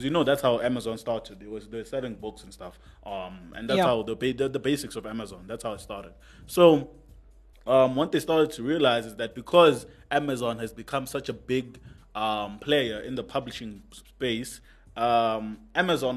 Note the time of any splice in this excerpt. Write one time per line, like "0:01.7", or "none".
none